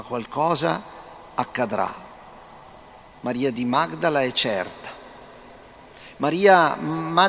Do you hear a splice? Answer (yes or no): no